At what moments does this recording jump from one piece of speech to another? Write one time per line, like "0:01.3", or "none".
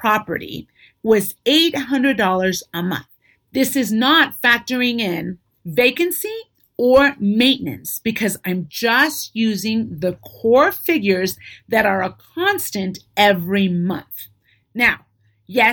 none